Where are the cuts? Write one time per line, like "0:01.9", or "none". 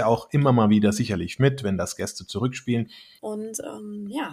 0:03.2

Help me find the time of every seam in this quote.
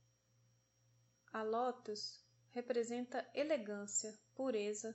none

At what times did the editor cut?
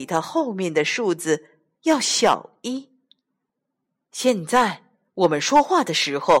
none

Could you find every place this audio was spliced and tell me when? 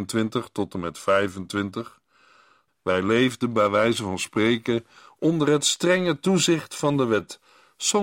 0:02.7

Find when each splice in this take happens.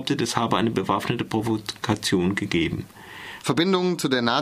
0:03.4

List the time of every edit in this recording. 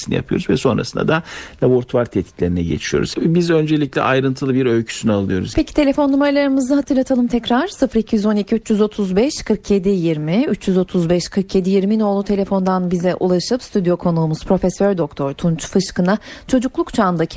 0:03.1
0:05.5

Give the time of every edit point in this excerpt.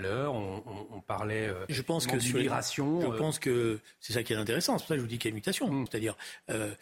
0:01.7
0:05.9

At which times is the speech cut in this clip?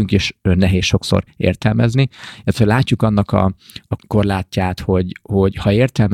none

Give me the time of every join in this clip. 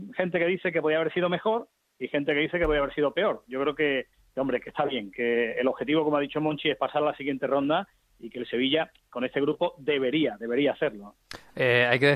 none

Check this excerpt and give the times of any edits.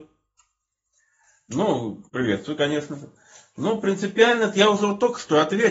0:02.1

